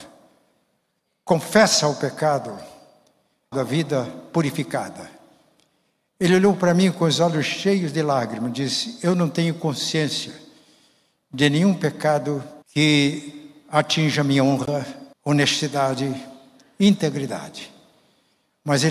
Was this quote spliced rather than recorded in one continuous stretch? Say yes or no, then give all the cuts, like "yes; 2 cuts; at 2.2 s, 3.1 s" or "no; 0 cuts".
yes; 3 cuts; at 3.5 s, 12.6 s, 15.1 s